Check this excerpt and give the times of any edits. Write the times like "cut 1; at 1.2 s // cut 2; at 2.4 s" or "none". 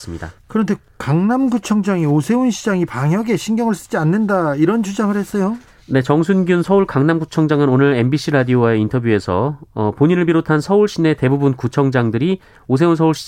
none